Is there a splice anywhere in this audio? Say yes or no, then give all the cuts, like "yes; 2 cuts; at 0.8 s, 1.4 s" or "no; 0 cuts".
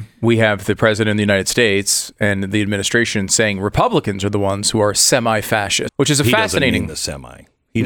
yes; 1 cut; at 5.9 s